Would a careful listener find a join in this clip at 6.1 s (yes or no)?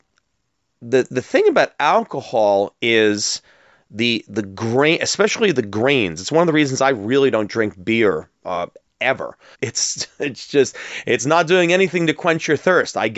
no